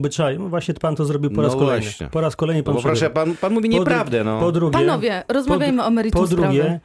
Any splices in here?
no; 0 cuts

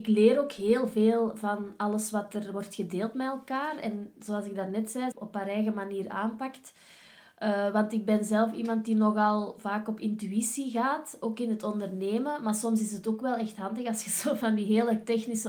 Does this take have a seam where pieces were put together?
yes; 1 cut; at 5.1 s

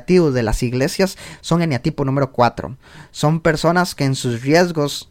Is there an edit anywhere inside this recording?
no; 0 cuts

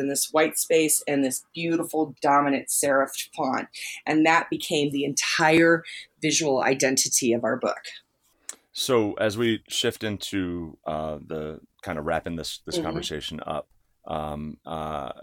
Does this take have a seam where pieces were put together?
no; 0 cuts

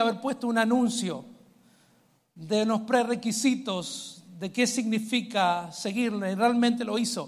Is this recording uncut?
yes; 0 cuts

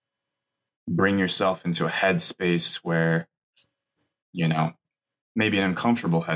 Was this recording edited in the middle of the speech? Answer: no; 0 cuts

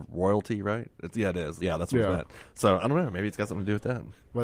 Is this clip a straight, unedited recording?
no; 1 cut; at 1.6 s

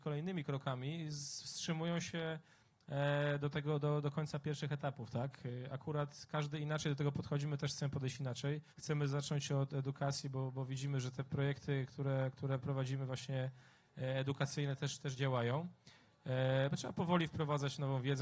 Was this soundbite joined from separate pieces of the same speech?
yes; 1 cut; at 8.7 s

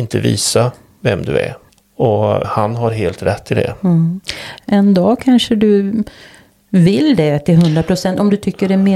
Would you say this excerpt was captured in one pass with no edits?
no; 2 cuts; at 2.4 s, 4.6 s

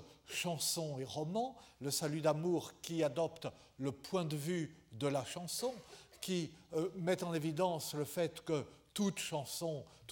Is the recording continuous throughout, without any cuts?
yes; 0 cuts

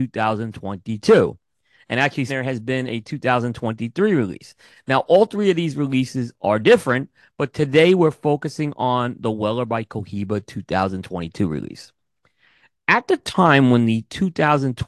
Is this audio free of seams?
no; 1 cut; at 2.3 s

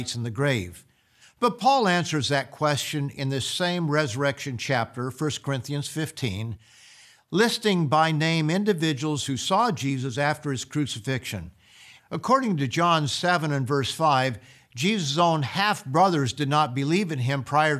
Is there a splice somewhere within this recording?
yes; 2 cuts; at 1.2 s, 12.0 s

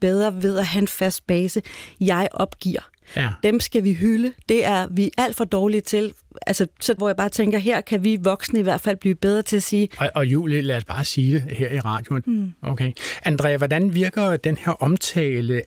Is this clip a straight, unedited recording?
no; 2 cuts; at 7.0 s, 12.2 s

